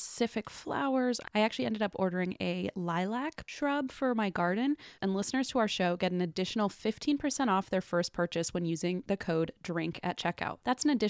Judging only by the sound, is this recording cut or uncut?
cut